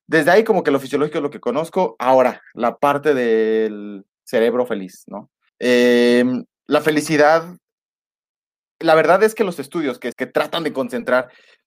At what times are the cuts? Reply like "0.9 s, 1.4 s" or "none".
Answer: 5.5 s, 10.1 s